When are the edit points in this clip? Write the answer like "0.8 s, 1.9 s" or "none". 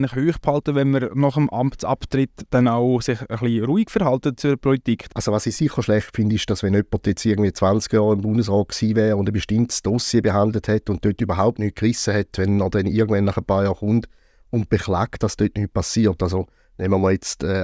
5.1 s